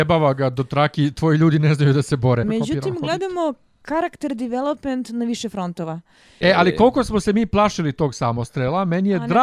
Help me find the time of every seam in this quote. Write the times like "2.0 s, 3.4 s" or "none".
2.4 s, 6.4 s